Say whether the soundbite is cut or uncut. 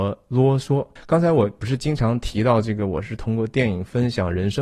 cut